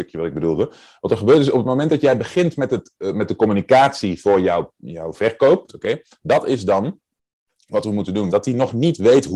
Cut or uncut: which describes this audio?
cut